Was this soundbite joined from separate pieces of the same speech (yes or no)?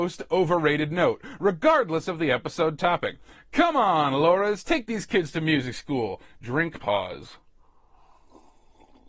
no